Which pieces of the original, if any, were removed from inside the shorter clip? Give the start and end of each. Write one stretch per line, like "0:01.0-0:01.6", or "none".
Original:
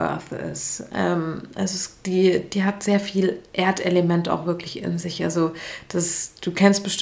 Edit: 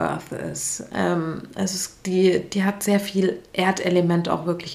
none